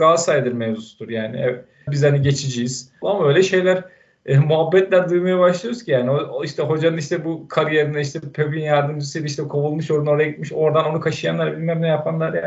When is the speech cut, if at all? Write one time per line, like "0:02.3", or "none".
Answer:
0:01.9
0:03.0

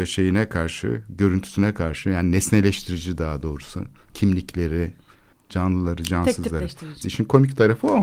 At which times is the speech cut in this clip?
0:05.3
0:07.0

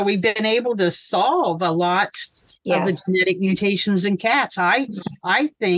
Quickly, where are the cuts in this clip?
none

